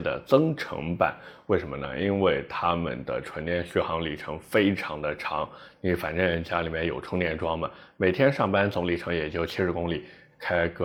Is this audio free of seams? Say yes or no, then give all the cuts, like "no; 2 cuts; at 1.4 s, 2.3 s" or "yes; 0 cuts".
yes; 0 cuts